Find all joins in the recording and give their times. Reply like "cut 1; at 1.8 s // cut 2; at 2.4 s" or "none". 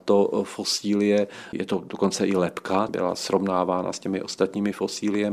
cut 1; at 2.9 s